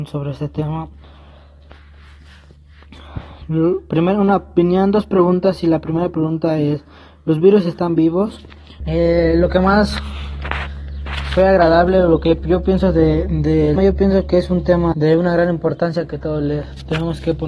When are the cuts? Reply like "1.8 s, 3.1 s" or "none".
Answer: 8.8 s, 13.8 s, 14.9 s